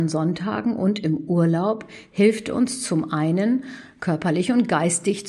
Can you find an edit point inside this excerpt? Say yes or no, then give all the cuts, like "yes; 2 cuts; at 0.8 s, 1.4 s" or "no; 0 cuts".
no; 0 cuts